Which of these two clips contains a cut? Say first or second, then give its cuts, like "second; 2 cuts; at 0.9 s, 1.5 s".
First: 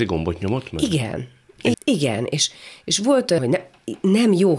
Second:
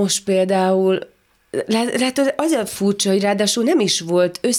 first; 2 cuts; at 1.7 s, 3.4 s